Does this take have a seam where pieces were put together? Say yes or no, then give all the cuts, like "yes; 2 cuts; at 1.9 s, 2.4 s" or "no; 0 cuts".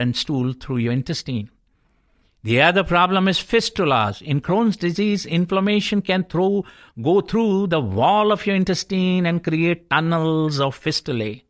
no; 0 cuts